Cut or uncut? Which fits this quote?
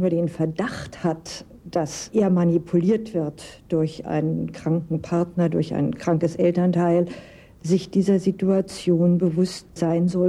uncut